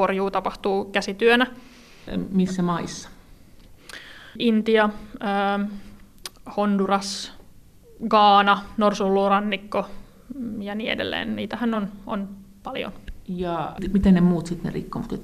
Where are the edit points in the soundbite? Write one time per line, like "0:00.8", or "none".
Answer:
none